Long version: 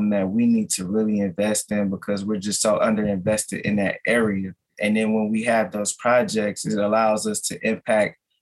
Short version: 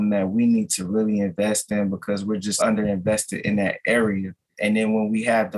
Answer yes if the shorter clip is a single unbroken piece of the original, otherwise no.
no